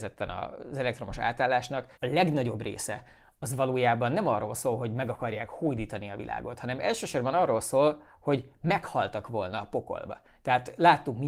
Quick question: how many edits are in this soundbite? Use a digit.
1